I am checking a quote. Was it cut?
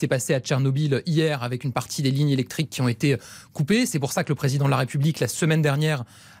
no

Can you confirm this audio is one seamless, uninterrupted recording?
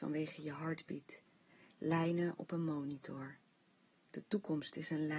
yes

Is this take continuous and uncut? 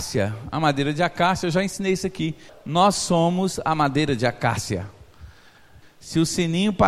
no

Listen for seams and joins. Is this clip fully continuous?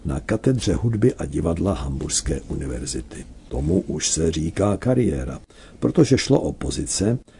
yes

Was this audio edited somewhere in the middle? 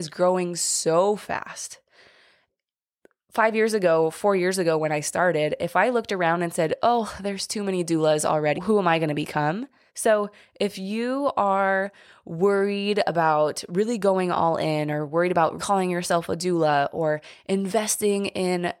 yes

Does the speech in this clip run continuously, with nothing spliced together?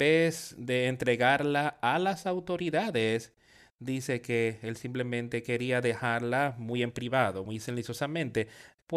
yes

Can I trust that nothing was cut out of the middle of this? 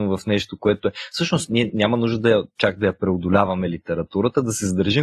yes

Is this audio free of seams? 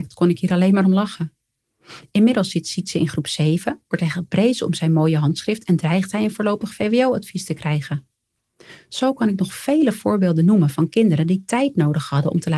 yes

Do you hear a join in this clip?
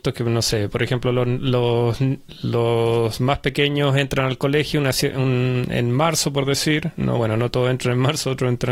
no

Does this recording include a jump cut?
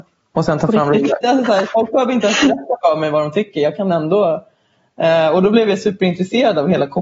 yes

